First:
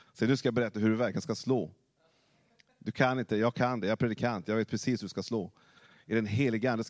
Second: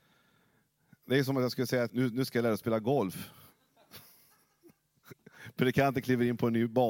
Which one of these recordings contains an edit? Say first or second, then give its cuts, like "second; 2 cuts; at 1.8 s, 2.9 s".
second; 1 cut; at 1.9 s